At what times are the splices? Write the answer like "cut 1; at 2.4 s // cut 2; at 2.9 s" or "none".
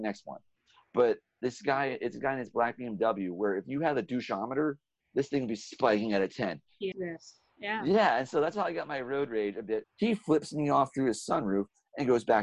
cut 1; at 6.9 s // cut 2; at 9.8 s